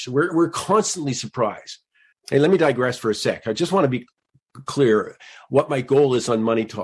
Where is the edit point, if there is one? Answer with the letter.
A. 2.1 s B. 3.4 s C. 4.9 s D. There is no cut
A